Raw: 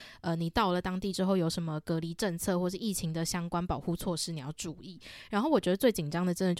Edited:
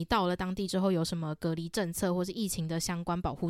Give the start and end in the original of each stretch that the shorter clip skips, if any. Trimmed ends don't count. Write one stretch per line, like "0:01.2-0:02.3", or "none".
none

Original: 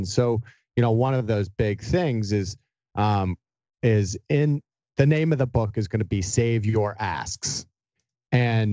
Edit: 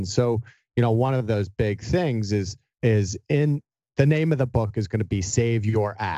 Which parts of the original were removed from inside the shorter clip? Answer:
0:02.7-0:03.7

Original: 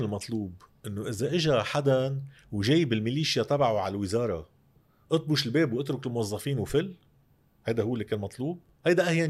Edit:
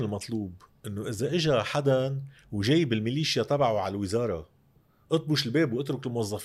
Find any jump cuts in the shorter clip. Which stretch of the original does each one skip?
none

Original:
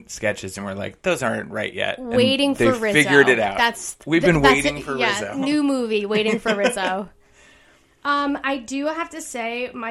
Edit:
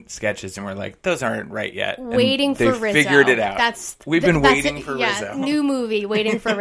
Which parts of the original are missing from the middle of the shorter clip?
none

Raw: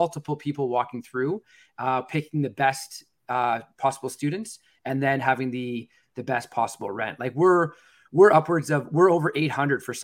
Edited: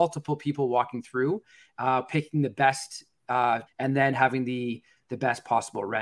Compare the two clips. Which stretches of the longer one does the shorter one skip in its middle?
0:03.7-0:04.7

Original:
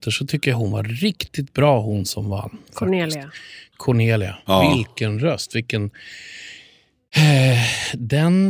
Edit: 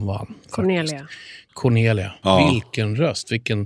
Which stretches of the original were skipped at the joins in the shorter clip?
none

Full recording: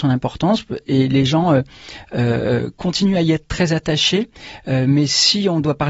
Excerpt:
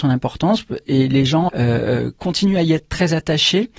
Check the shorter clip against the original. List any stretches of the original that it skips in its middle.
0:01.5-0:02.1

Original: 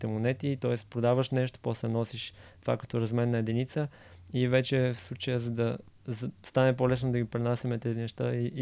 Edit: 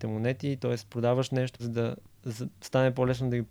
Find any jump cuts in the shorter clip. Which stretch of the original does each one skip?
0:01.6-0:05.4

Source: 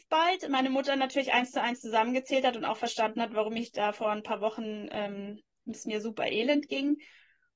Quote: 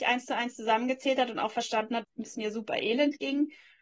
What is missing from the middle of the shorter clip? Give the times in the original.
0:03.3-0:05.5

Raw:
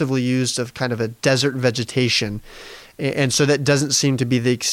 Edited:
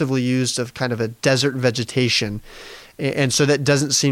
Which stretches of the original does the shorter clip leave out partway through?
none

